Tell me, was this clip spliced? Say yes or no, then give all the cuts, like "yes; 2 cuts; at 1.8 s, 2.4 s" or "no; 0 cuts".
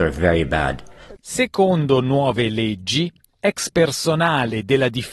yes; 1 cut; at 1.2 s